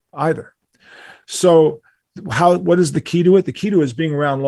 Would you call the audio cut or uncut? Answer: uncut